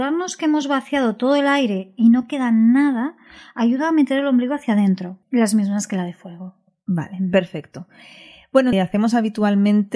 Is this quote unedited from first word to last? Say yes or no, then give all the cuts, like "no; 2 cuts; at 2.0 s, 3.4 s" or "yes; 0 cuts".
no; 2 cuts; at 5.2 s, 8.7 s